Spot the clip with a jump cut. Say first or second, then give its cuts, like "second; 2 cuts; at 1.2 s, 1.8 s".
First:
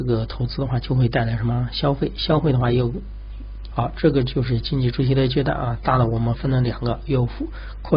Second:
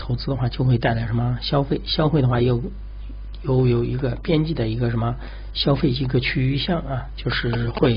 first; 1 cut; at 3.7 s